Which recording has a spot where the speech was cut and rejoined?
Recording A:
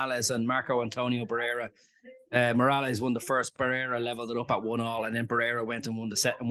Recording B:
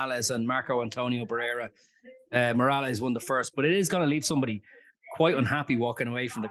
B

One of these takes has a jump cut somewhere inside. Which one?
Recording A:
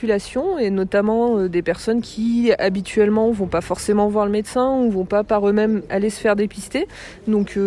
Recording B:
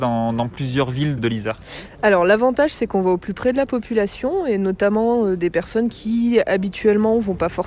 B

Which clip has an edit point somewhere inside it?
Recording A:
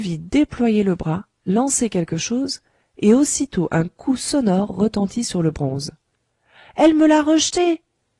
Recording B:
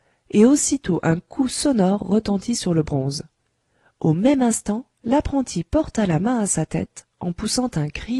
A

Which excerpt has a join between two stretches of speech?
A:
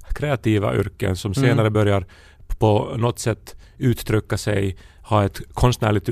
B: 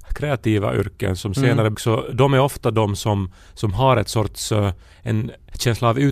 B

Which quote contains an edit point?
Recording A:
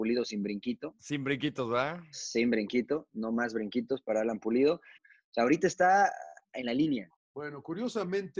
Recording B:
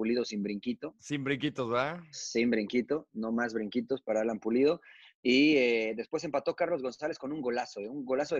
A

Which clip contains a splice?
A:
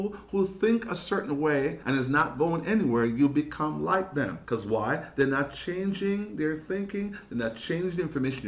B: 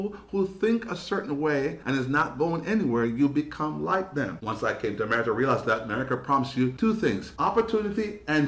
B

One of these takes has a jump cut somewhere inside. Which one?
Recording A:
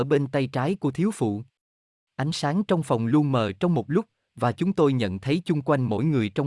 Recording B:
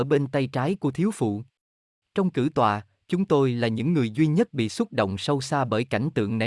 B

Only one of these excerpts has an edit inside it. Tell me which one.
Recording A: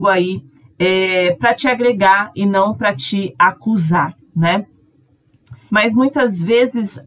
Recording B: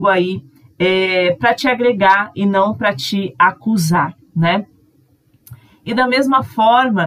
A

